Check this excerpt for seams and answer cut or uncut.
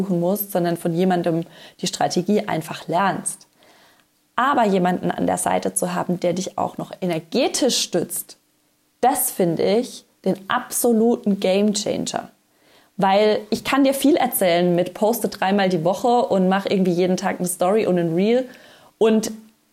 uncut